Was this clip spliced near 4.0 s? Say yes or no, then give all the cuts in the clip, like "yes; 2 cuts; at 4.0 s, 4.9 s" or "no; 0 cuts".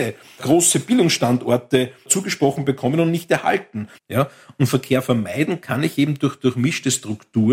yes; 1 cut; at 4.0 s